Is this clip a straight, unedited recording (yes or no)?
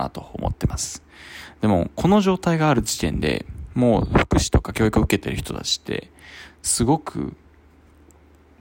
yes